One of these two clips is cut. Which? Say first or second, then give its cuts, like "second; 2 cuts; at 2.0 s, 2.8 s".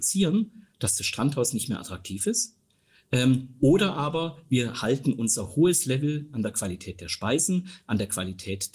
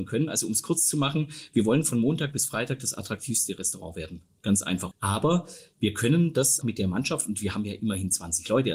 second; 2 cuts; at 4.9 s, 6.6 s